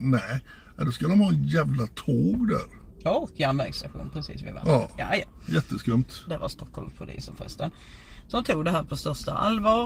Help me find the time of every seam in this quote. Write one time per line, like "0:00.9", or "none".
0:06.3